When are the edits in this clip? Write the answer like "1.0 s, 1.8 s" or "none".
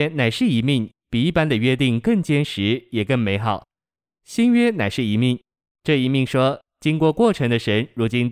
4.1 s

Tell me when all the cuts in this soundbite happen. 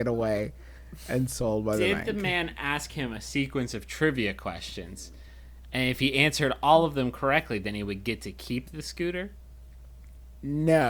none

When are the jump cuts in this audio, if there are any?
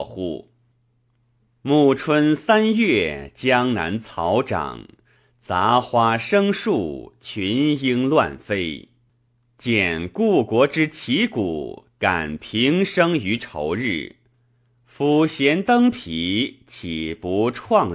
none

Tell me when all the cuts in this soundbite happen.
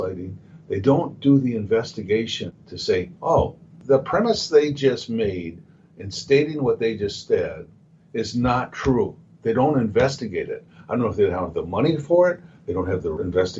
none

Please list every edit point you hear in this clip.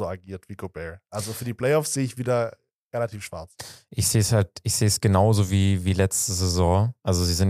none

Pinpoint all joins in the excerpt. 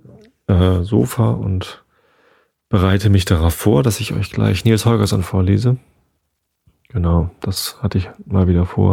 none

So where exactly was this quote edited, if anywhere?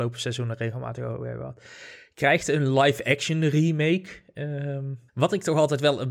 5.1 s

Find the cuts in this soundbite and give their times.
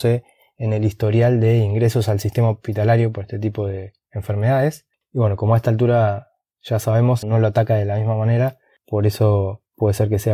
5.0 s, 7.2 s

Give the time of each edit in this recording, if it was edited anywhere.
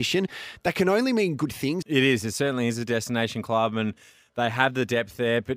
1.8 s

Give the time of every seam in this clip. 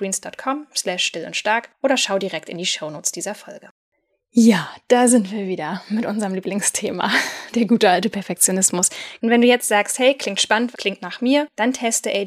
9.2 s, 10.7 s

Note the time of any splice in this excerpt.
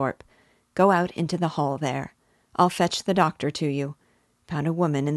none

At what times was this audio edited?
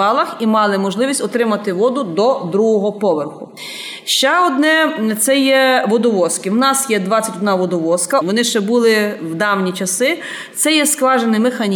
8.2 s

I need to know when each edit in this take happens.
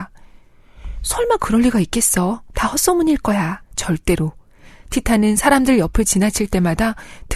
3.6 s

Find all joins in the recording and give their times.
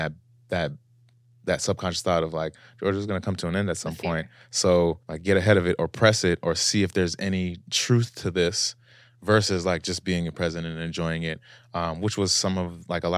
5.0 s

